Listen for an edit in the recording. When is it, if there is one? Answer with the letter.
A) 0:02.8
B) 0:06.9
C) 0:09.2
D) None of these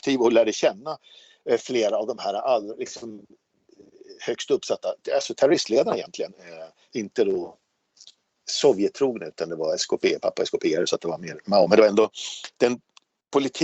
B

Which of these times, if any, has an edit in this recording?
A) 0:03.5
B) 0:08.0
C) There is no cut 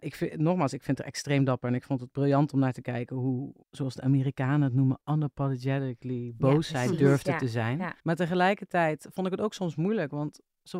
B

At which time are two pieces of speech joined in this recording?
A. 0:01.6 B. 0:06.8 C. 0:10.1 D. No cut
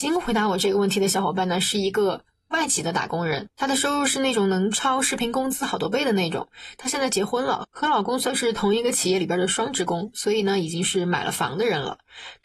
D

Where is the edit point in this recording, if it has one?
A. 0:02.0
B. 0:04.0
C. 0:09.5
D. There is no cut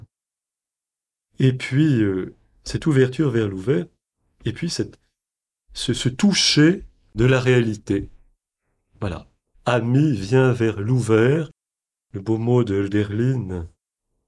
C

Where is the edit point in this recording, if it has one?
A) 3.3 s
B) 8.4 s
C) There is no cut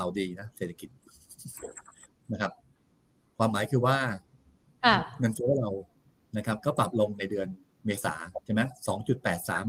B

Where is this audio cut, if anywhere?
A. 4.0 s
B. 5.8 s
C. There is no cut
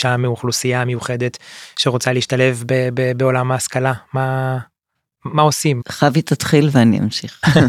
B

